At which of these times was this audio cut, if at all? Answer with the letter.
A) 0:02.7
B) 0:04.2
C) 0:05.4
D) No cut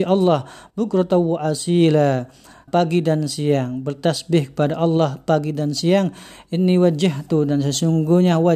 A